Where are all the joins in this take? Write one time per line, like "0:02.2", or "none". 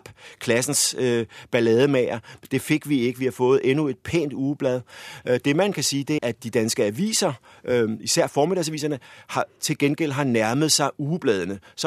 0:06.2